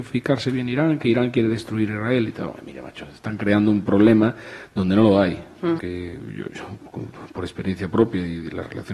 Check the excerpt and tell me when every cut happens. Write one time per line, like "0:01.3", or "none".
0:05.8